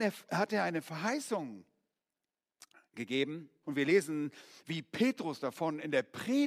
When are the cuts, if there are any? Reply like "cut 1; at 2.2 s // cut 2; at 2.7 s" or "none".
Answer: cut 1; at 3.6 s